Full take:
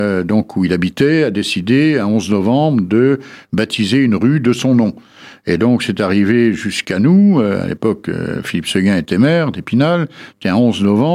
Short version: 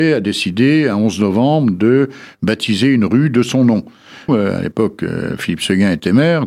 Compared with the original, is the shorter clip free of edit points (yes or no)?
no